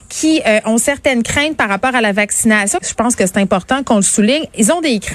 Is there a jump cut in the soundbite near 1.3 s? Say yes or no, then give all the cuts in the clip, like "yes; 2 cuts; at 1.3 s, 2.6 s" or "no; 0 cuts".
no; 1 cut; at 2.8 s